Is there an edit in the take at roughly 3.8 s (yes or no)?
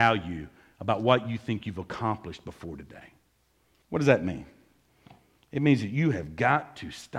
yes